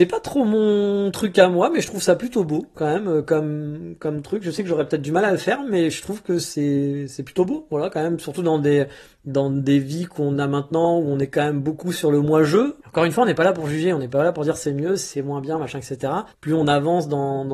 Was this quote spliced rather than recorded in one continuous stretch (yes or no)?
yes